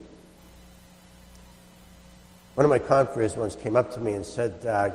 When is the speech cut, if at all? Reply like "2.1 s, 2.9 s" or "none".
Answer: none

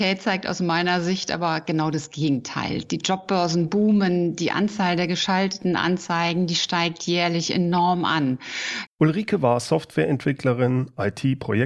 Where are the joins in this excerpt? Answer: 8.9 s

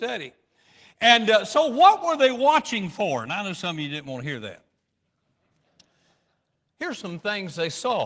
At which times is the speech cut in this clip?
none

